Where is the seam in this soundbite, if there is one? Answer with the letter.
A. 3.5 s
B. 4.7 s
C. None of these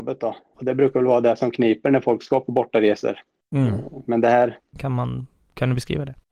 B